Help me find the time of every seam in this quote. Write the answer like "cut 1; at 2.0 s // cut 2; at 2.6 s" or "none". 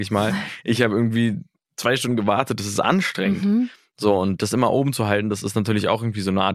none